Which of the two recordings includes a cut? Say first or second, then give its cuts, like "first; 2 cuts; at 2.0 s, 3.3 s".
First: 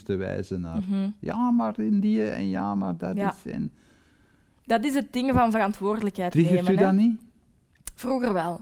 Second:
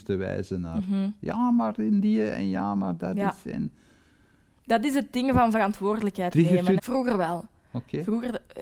second; 1 cut; at 6.8 s